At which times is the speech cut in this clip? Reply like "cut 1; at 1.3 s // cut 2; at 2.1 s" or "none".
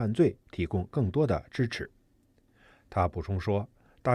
cut 1; at 2.1 s